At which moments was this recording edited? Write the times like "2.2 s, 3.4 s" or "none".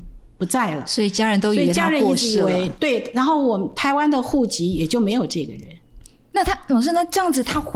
none